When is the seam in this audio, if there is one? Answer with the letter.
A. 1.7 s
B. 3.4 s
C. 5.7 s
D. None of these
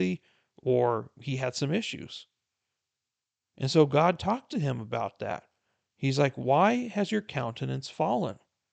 D